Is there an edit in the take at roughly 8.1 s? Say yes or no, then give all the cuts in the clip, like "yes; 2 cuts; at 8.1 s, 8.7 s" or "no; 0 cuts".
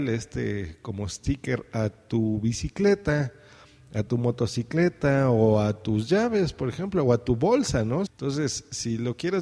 yes; 1 cut; at 8.1 s